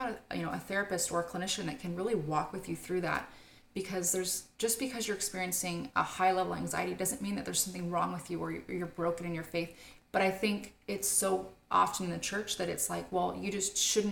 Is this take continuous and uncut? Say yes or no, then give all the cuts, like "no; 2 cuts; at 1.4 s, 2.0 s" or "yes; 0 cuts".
no; 2 cuts; at 4.5 s, 10.0 s